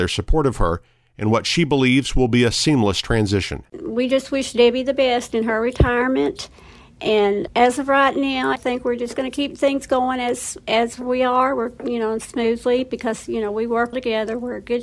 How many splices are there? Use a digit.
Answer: 1